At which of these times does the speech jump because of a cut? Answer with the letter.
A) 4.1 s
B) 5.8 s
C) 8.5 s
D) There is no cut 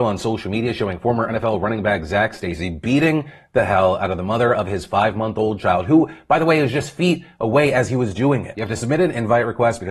C